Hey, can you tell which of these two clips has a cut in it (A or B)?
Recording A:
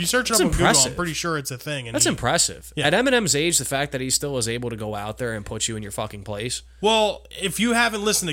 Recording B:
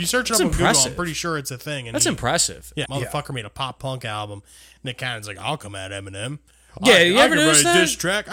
B